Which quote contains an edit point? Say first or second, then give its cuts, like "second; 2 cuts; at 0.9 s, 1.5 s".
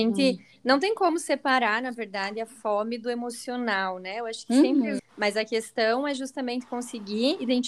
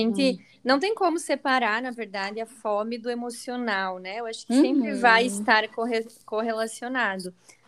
first; 1 cut; at 5.0 s